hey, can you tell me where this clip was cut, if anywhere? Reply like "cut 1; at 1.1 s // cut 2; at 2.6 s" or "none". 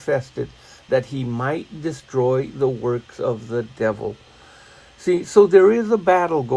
none